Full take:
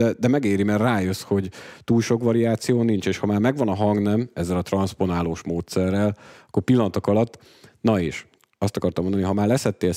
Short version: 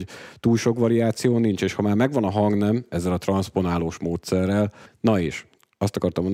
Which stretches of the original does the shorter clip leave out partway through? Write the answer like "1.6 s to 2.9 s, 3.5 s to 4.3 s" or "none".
6.3 s to 7.7 s